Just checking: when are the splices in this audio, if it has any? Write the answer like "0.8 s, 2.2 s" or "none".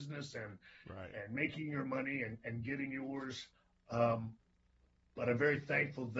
none